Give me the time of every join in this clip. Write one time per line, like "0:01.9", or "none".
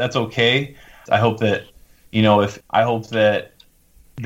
0:01.1
0:02.6